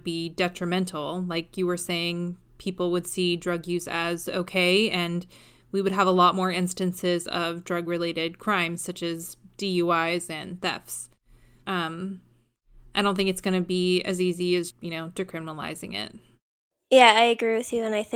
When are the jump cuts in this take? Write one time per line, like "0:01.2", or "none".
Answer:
0:11.6
0:14.7